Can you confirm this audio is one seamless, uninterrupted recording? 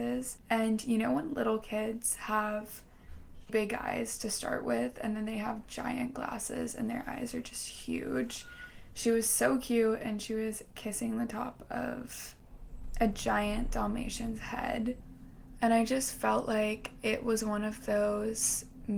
no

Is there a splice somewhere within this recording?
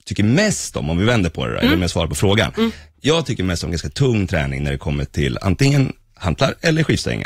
no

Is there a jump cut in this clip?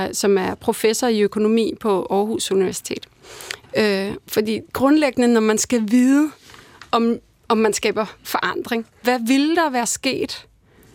yes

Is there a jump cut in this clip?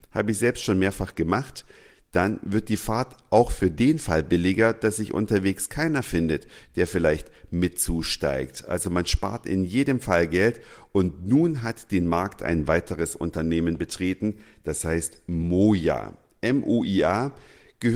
no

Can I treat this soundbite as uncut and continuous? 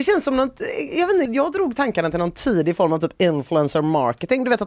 no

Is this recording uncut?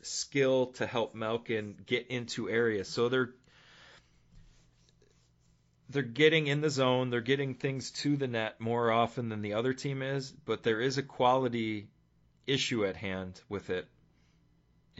yes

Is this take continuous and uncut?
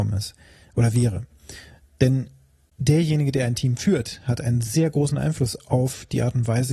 yes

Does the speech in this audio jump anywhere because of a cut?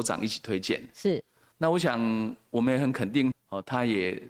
yes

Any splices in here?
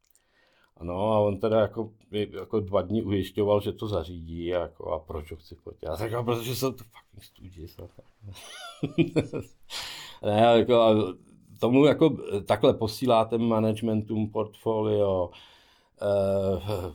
no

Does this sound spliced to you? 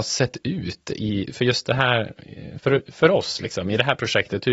yes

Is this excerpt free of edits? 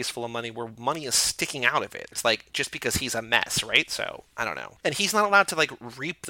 no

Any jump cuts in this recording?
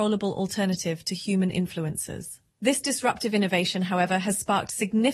yes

